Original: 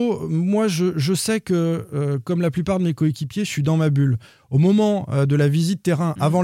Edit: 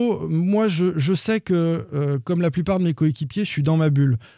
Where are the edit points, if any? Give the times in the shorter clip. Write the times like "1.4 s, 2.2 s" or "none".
none